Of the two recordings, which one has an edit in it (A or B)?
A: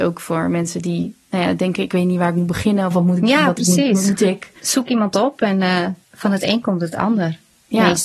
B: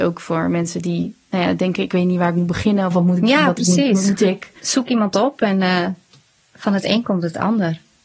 A